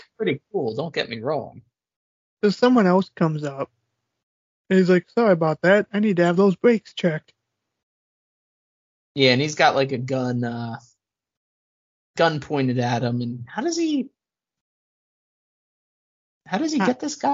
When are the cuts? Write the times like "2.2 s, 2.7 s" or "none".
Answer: none